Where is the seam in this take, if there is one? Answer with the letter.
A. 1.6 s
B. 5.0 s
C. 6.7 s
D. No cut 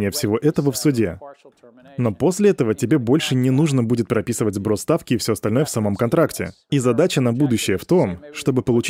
C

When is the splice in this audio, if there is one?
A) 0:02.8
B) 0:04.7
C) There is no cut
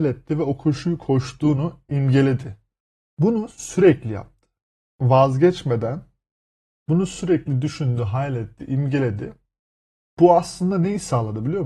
C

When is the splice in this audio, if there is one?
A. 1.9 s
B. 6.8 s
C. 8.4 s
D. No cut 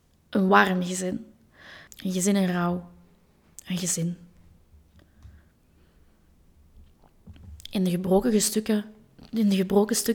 A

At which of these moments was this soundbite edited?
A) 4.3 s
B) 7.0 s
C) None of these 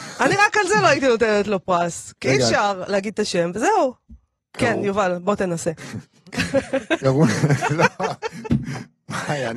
B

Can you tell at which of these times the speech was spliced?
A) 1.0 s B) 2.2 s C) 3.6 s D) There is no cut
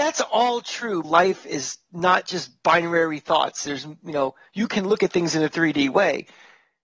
A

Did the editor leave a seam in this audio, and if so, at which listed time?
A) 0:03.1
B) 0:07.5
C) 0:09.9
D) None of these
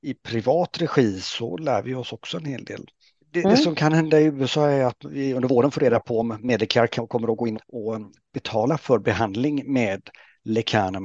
B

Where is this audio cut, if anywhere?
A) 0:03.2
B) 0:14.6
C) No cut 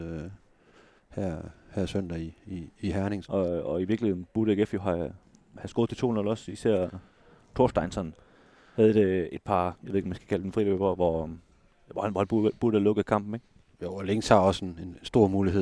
A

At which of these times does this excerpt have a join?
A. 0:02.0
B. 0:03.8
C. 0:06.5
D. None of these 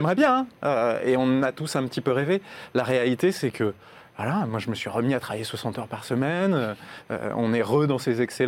D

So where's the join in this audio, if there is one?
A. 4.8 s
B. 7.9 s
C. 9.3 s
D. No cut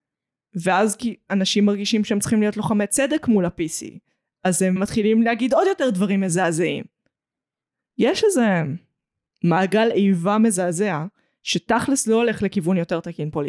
A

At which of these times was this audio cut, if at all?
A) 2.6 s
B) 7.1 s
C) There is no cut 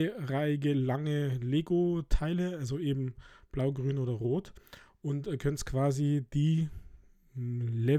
C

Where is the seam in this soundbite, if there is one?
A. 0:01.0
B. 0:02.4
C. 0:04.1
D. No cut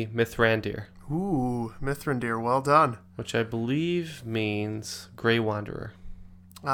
D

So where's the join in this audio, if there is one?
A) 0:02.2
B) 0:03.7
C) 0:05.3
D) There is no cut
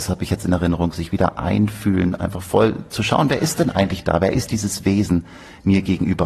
A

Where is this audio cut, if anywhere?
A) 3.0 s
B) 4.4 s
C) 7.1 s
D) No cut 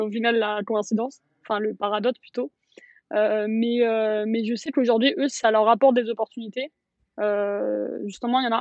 D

